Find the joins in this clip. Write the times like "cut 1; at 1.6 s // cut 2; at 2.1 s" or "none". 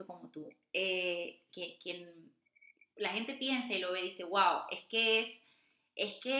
cut 1; at 1.5 s